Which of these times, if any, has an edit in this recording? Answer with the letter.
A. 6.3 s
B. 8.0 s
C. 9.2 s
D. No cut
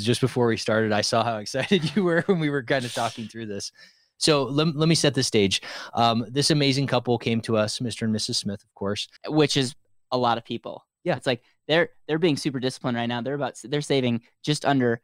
C